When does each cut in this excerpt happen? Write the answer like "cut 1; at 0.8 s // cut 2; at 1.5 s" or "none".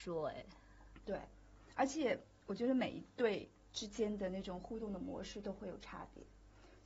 none